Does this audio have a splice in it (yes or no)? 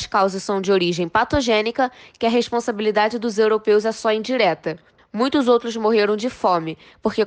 yes